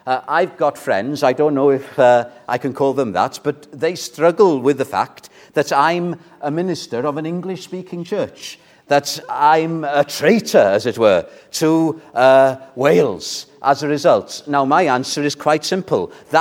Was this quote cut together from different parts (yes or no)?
no